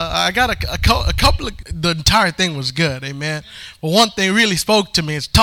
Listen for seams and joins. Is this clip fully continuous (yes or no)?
no